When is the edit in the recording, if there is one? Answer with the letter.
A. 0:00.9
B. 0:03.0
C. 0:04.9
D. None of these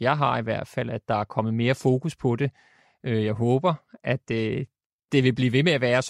D